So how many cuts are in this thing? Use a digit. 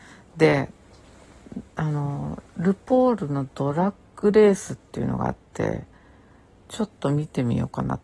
0